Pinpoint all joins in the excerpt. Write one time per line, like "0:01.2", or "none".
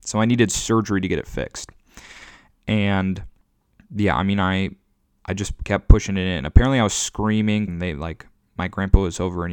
0:07.7